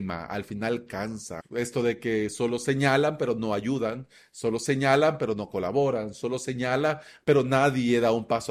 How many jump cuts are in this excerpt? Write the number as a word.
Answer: one